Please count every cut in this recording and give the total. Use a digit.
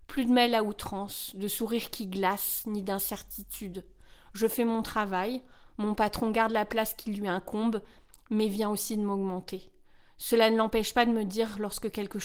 0